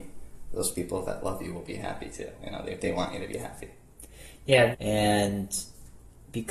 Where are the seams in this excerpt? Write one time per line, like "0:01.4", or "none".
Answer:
0:04.7